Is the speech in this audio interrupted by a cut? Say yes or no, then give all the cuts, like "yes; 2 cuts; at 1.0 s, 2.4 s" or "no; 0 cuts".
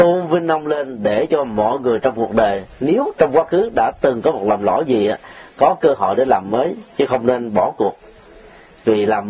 no; 0 cuts